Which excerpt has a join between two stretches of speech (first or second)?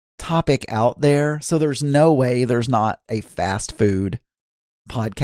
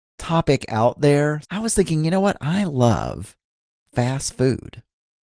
second